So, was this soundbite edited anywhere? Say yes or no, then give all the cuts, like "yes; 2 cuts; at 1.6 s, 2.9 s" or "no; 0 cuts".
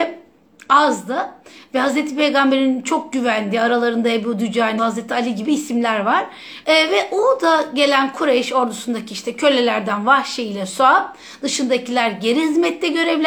yes; 2 cuts; at 4.8 s, 6.6 s